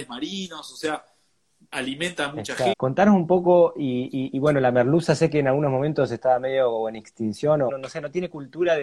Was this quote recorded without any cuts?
no; 2 cuts; at 2.7 s, 7.7 s

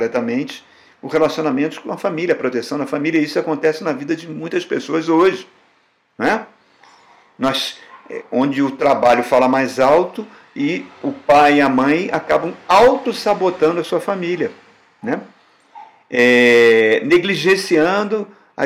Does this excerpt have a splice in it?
no; 0 cuts

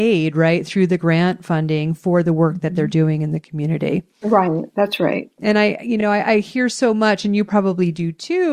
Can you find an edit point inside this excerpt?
no; 0 cuts

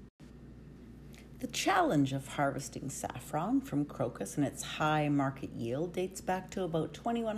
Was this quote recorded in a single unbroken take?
yes; 0 cuts

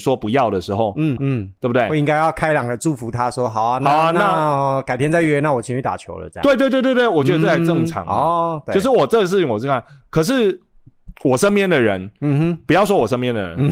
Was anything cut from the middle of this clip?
yes; 1 cut; at 1.2 s

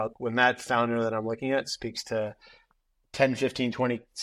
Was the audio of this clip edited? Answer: no; 0 cuts

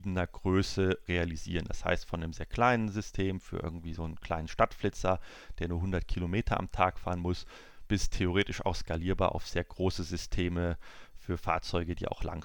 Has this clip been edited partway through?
no; 0 cuts

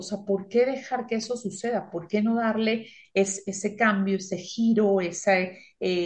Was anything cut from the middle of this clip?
no; 0 cuts

